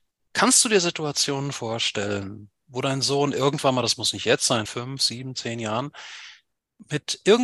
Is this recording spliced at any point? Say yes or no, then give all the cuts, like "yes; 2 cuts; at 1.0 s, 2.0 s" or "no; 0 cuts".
yes; 1 cut; at 4.7 s